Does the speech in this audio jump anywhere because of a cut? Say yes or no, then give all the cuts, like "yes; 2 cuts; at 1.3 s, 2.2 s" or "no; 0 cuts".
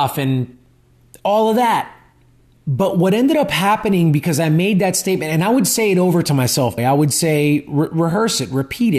yes; 1 cut; at 6.8 s